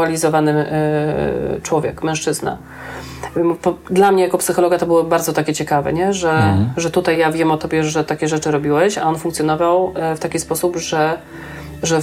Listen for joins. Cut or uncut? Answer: cut